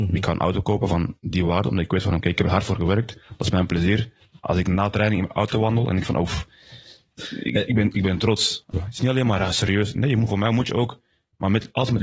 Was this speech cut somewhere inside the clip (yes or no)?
yes